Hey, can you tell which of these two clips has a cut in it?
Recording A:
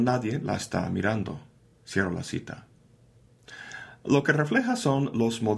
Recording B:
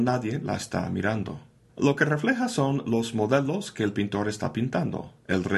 B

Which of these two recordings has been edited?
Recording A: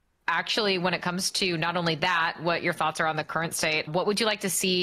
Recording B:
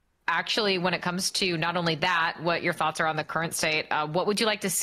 A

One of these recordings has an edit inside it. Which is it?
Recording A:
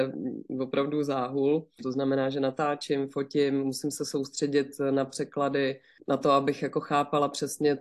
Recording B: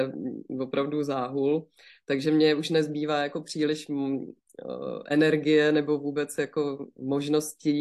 A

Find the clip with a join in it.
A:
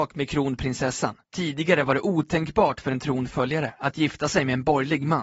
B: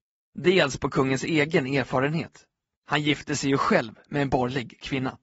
A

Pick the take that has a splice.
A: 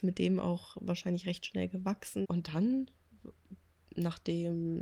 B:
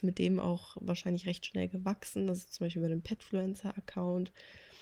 A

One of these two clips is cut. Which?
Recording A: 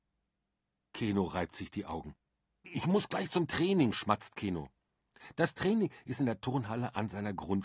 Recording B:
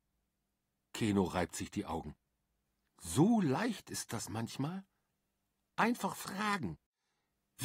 A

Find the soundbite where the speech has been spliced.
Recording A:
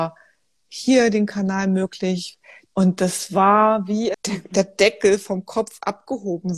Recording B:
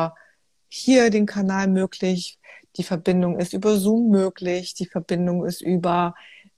A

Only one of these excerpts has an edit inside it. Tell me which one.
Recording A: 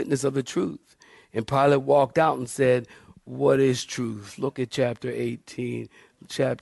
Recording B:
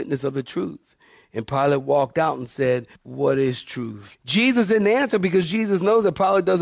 B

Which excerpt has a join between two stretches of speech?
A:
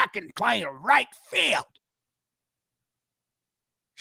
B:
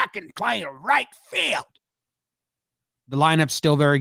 B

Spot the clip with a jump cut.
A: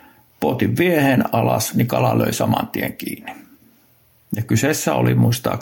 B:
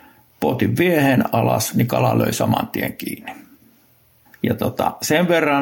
B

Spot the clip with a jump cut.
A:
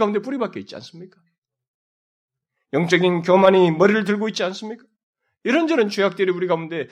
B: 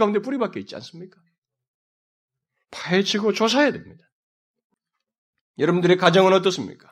B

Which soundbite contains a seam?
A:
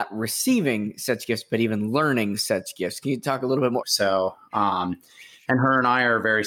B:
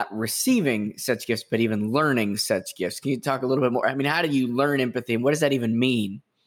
A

